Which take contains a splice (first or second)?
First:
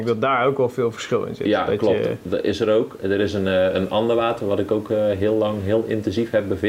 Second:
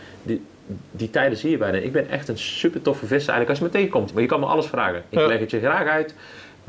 second